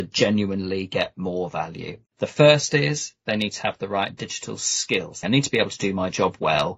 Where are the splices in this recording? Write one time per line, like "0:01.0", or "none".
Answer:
0:02.1
0:05.2

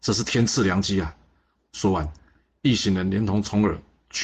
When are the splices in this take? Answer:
0:01.6

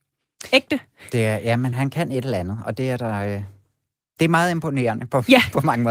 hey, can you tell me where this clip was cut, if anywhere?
0:01.7

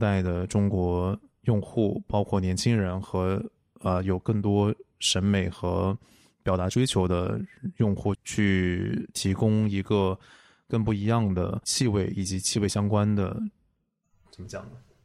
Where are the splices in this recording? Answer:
0:08.1

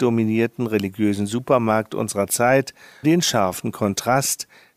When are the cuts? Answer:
0:03.0

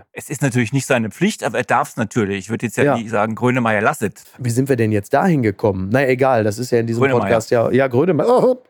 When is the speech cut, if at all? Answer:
0:04.2

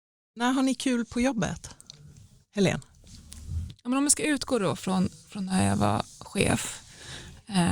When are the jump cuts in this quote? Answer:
none

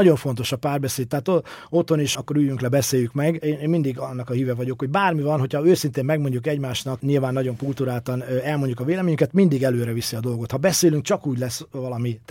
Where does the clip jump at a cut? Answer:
0:02.1

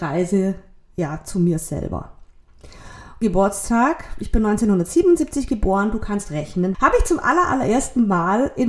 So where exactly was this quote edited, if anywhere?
0:03.2
0:06.7

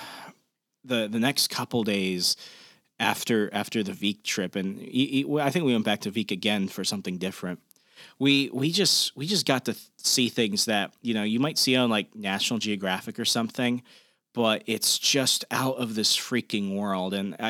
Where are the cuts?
none

